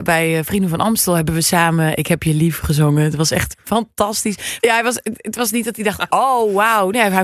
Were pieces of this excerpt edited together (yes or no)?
yes